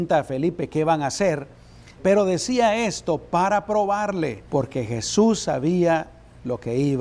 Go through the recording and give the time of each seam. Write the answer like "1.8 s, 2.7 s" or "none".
2.0 s, 4.5 s